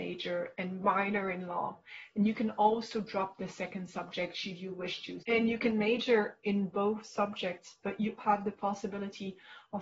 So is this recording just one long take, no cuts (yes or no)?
no